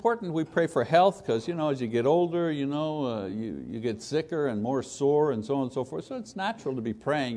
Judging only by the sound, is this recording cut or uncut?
uncut